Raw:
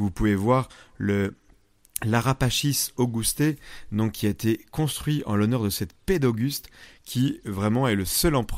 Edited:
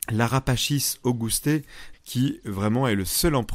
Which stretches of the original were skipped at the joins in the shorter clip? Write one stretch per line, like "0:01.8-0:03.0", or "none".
0:03.9-0:06.9